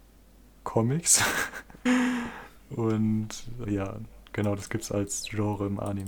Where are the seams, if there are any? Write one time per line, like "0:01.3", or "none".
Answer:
0:01.9
0:03.6